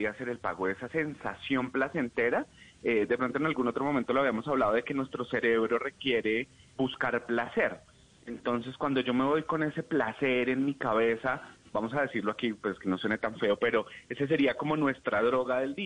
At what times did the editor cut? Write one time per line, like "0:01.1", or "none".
0:06.7